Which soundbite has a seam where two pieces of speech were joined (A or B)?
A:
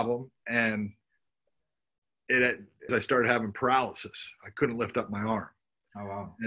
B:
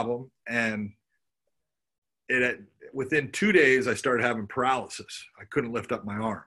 A